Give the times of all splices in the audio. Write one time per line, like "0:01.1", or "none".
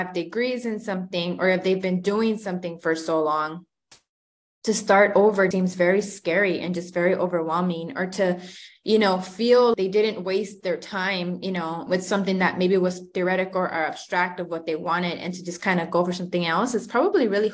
0:05.5
0:09.7
0:11.9